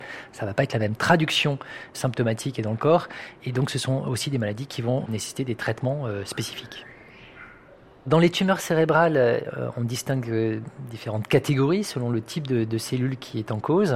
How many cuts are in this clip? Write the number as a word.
zero